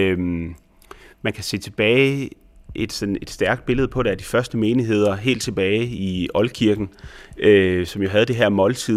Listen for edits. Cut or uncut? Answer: uncut